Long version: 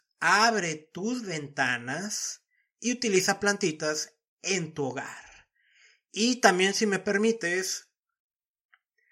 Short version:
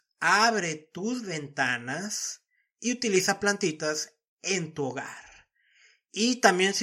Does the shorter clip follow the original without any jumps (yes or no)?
yes